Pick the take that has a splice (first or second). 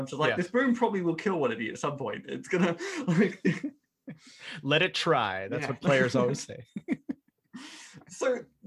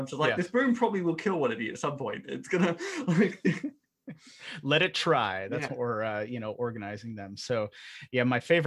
second